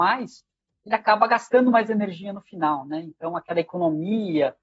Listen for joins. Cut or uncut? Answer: uncut